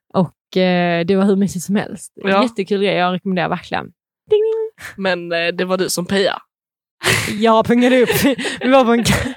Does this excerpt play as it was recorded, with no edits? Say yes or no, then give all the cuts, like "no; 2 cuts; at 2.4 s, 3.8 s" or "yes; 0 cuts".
yes; 0 cuts